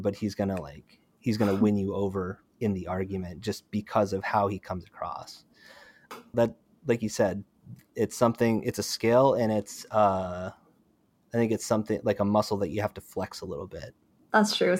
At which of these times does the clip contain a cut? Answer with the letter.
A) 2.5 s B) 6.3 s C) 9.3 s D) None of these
B